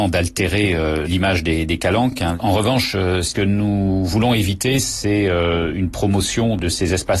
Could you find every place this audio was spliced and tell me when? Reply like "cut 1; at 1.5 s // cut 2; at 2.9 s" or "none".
none